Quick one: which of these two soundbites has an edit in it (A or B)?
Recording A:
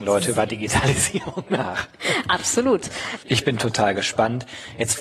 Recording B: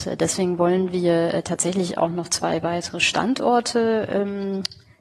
A